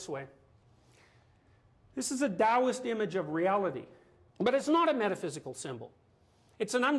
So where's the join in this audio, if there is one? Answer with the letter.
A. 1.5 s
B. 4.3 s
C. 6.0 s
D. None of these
B